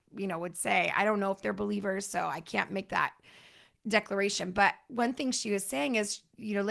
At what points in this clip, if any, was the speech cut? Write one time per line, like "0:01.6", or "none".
none